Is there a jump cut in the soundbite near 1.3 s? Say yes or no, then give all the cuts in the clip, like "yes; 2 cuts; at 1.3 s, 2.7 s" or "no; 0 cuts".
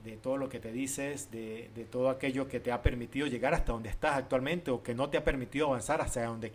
no; 0 cuts